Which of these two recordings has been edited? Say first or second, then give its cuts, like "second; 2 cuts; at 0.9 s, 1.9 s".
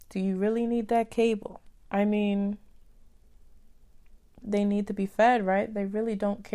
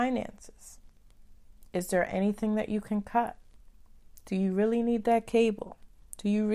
first; 2 cuts; at 1.9 s, 4.4 s